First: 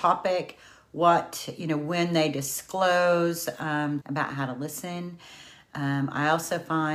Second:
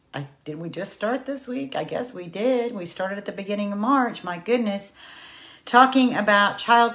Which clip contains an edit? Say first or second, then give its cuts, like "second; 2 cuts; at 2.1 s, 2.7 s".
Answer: first; 1 cut; at 4.0 s